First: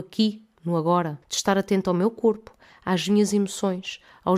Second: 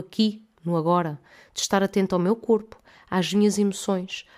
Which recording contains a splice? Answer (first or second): first